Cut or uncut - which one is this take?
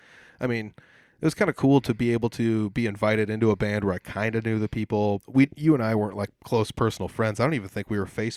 cut